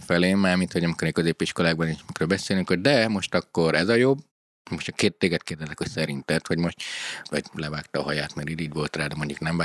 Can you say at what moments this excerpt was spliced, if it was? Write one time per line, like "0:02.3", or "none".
0:07.2